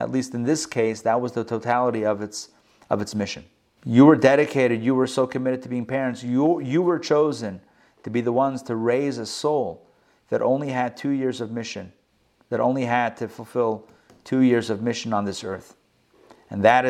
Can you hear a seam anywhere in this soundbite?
yes; 1 cut; at 3.8 s

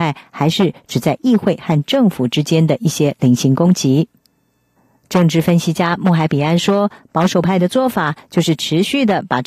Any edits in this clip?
no; 0 cuts

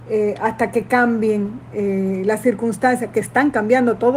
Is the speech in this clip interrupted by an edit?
no; 0 cuts

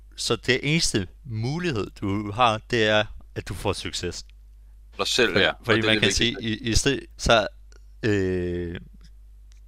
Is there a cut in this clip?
yes; 2 cuts; at 4.9 s, 7.1 s

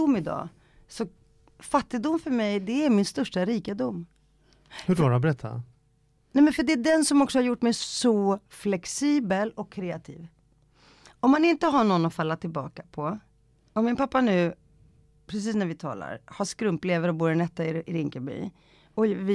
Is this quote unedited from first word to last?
yes; 0 cuts

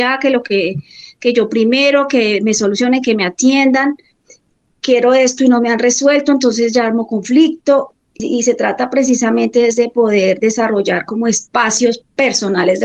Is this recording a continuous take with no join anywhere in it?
yes; 0 cuts

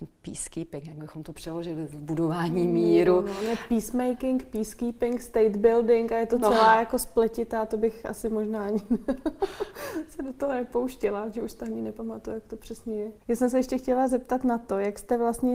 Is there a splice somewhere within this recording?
yes; 1 cut; at 13.2 s

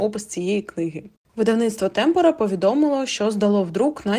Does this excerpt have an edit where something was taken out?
yes; 1 cut; at 1.2 s

